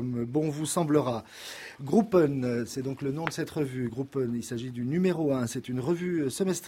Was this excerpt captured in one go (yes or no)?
yes